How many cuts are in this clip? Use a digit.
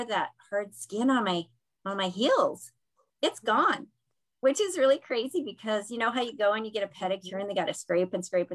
0